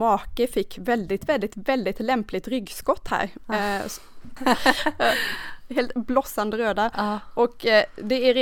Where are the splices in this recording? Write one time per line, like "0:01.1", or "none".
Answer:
0:04.4